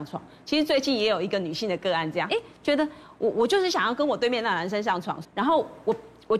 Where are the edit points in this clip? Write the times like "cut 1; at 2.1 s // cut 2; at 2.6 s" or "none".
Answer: cut 1; at 2.3 s // cut 2; at 5.2 s

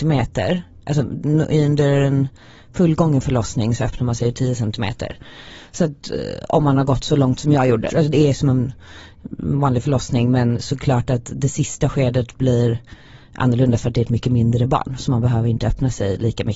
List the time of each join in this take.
cut 1; at 7.9 s

